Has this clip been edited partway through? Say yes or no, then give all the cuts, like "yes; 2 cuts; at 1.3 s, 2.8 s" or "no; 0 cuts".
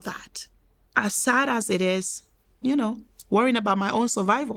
yes; 1 cut; at 2.6 s